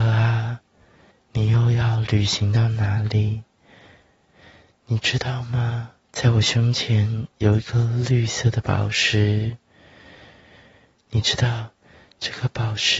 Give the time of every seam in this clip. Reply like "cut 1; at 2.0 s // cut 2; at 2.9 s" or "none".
cut 1; at 1.1 s // cut 2; at 6.1 s